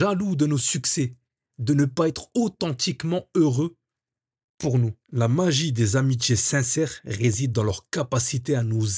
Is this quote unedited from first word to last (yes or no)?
yes